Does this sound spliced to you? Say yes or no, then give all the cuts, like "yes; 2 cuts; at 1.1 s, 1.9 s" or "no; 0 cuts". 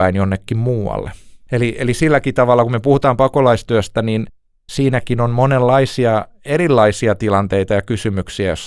no; 0 cuts